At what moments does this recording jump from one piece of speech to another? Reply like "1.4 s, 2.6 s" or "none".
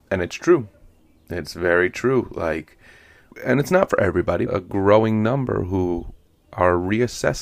3.3 s, 4.5 s